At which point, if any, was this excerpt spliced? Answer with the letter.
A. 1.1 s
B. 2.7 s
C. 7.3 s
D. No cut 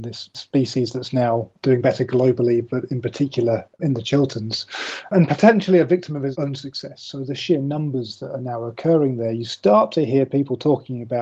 D